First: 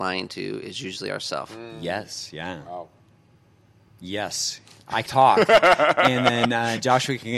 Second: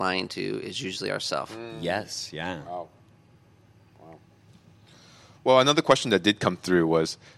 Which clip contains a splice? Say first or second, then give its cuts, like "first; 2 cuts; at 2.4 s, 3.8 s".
first; 2 cuts; at 3.9 s, 5.1 s